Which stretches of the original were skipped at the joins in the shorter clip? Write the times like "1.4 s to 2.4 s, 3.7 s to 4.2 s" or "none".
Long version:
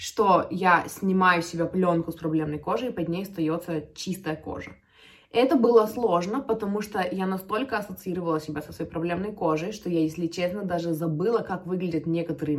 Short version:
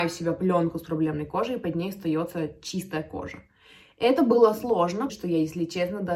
6.4 s to 9.7 s